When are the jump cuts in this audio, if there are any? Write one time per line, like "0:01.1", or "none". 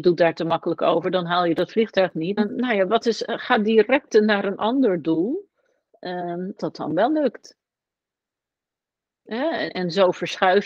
0:02.4
0:06.6
0:09.7